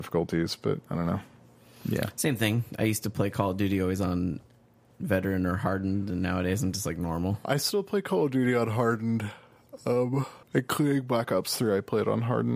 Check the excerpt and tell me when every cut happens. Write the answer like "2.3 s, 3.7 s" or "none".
10.4 s